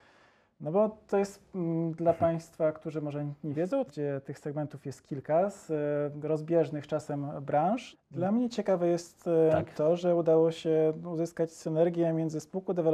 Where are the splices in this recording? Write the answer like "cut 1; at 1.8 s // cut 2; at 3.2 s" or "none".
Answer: cut 1; at 3.9 s // cut 2; at 7.9 s